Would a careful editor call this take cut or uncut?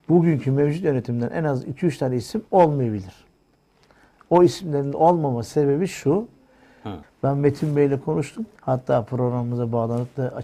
cut